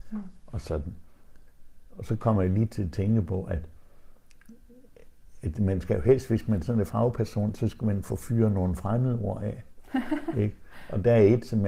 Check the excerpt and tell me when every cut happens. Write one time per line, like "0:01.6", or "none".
none